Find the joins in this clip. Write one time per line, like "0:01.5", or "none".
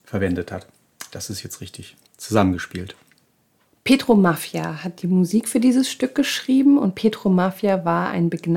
none

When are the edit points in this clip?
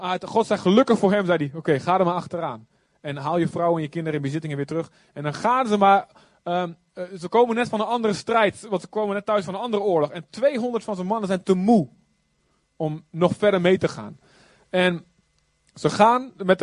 none

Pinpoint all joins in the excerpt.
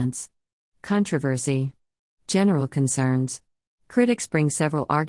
0:03.8

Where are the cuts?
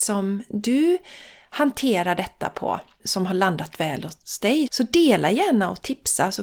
0:03.0
0:04.7

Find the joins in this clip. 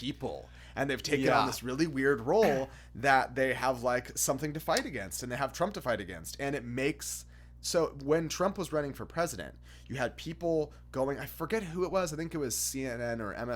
none

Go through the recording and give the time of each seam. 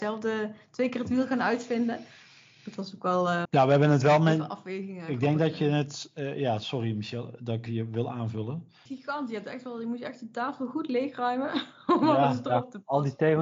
0:03.4
0:07.7
0:08.9

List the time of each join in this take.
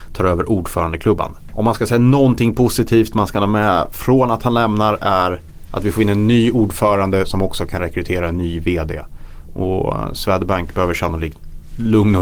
none

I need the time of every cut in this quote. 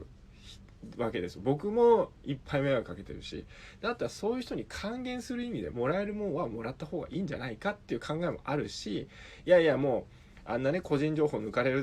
0:05.7

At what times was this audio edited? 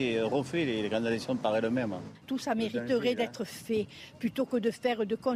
0:02.2

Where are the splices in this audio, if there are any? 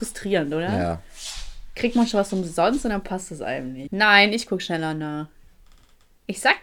0:03.9

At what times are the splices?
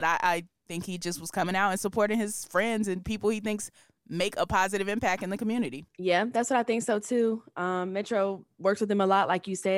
none

